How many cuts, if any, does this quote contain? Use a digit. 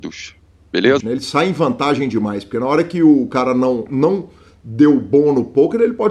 1